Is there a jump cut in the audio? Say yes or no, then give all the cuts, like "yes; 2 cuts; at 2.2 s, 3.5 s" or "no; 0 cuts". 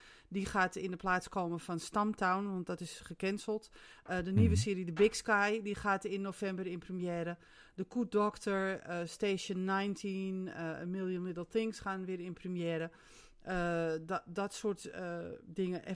no; 0 cuts